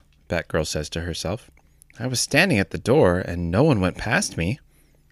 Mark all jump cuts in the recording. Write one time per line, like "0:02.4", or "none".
none